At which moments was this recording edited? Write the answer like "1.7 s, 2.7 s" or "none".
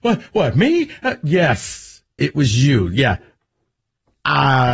none